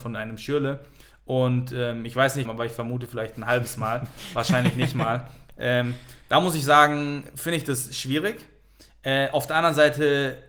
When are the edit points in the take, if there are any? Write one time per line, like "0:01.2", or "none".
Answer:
0:02.4